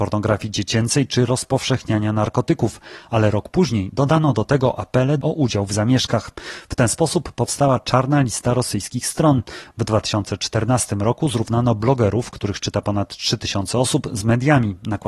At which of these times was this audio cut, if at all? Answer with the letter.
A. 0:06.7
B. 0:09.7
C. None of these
C